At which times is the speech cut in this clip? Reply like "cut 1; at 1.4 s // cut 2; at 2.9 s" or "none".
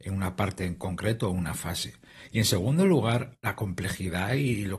none